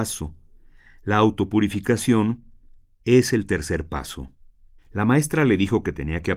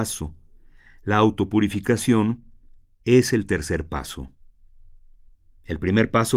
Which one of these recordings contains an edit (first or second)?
first